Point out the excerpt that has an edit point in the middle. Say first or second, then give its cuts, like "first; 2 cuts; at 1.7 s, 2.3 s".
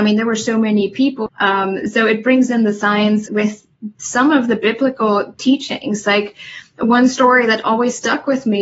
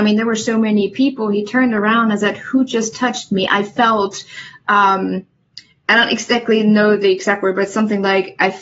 first; 2 cuts; at 1.3 s, 3.3 s